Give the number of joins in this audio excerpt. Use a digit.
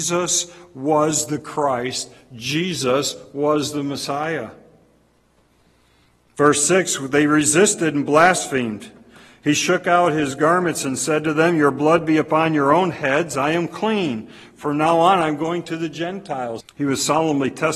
1